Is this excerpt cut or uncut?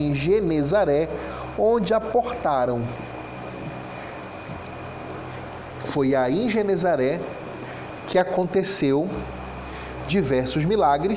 uncut